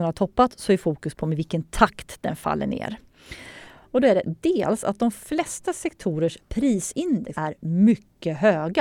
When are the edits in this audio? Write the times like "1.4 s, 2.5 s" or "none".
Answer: 3.8 s, 7.3 s